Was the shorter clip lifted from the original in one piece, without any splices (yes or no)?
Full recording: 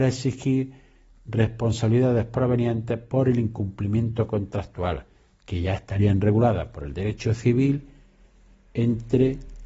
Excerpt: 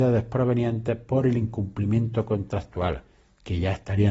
yes